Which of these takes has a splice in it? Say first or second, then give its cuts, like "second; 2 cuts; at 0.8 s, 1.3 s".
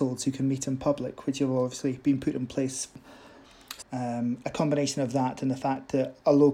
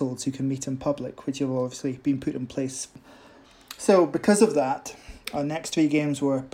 first; 1 cut; at 3.8 s